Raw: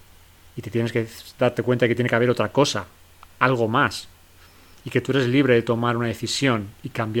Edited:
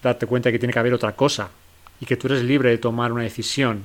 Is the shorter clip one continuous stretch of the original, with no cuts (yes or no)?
no